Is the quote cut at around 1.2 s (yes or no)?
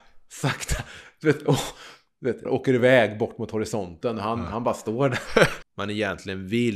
no